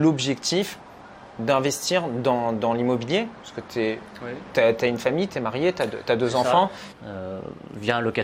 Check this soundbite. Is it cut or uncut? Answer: cut